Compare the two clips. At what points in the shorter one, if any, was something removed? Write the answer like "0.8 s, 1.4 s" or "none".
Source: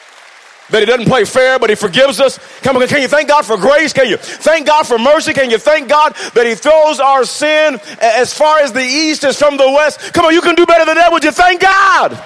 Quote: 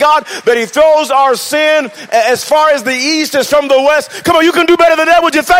none